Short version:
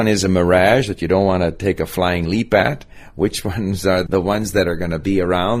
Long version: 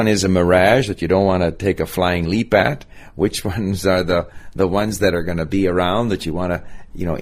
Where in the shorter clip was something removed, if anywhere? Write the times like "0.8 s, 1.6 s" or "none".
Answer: 4.1 s